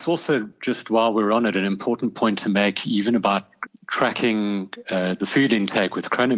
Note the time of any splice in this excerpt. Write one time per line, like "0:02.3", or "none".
0:03.7